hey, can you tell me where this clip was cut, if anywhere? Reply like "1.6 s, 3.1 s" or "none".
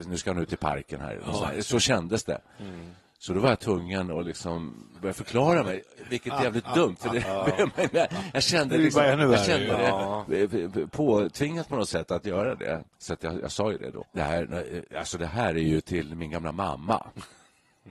12.9 s, 14.0 s